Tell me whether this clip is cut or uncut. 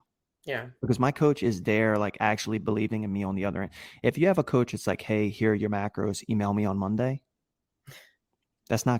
uncut